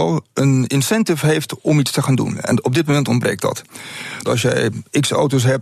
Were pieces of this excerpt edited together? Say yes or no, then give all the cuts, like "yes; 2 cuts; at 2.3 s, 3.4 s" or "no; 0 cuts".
yes; 1 cut; at 4.2 s